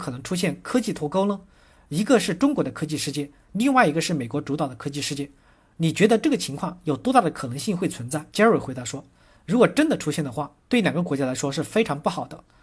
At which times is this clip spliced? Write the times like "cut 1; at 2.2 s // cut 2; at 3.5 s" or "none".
cut 1; at 8.3 s